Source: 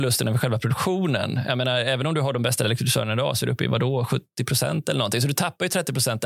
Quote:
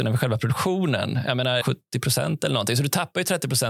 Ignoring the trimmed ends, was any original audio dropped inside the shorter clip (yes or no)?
yes